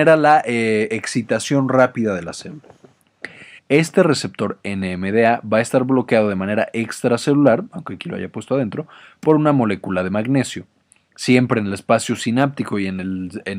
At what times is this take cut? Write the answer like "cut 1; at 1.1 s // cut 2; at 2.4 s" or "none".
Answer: cut 1; at 3.6 s